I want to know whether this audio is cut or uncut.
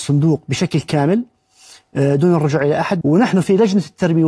cut